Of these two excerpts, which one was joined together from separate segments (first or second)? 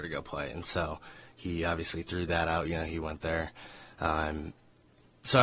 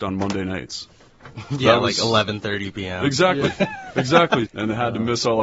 second